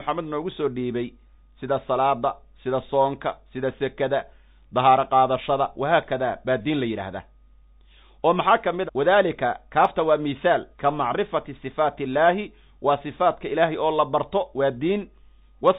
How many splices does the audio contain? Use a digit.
2